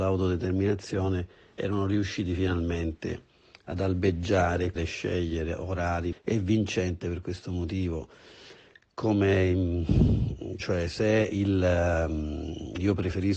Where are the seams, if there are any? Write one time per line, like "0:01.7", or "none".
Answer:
0:04.8
0:06.1
0:10.6